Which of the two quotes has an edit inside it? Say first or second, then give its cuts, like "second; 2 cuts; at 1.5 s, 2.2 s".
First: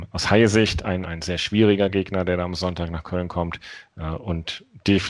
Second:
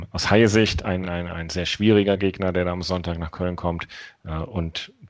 first; 1 cut; at 1.0 s